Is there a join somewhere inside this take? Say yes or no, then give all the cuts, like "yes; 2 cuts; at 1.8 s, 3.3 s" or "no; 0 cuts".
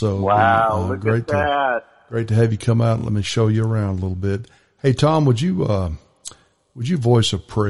no; 0 cuts